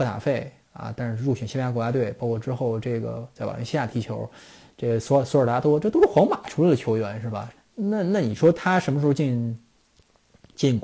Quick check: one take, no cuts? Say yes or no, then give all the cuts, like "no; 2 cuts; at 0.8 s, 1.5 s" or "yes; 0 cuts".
no; 1 cut; at 7.6 s